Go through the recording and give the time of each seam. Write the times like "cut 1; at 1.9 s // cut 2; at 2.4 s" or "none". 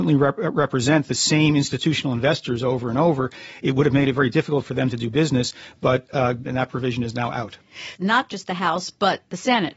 cut 1; at 6.4 s // cut 2; at 8.0 s